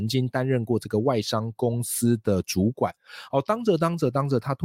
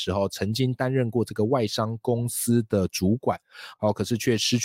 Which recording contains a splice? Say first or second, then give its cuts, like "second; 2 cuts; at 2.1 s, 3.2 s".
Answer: second; 1 cut; at 3.7 s